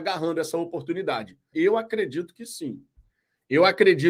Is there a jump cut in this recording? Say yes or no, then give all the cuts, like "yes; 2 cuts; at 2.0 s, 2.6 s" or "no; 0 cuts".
yes; 1 cut; at 1.5 s